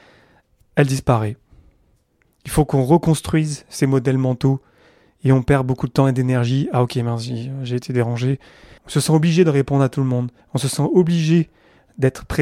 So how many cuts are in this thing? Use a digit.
2